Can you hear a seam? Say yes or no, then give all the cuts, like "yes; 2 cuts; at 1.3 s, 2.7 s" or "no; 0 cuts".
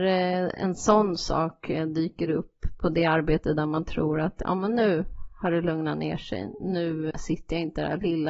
yes; 1 cut; at 7.1 s